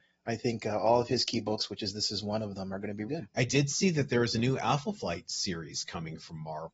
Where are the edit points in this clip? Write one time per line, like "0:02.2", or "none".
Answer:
0:03.1